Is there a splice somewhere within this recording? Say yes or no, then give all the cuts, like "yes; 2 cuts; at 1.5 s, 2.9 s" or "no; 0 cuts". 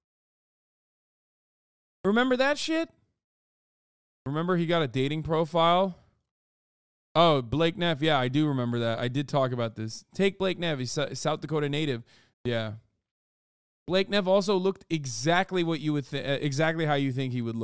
yes; 1 cut; at 12.3 s